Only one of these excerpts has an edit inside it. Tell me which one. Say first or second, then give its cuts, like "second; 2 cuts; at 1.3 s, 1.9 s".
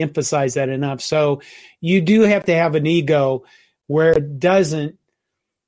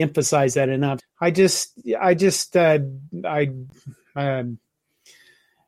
second; 1 cut; at 1.0 s